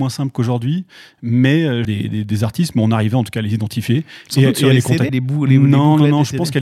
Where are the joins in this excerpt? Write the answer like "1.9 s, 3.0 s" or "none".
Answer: 1.9 s, 5.1 s